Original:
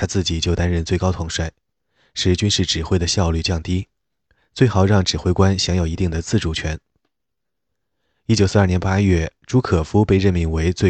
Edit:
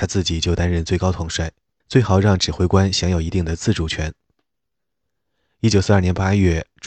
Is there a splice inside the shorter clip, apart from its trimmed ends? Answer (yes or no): yes